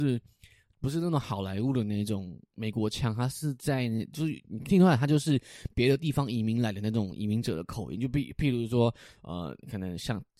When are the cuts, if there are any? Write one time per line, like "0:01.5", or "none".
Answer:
none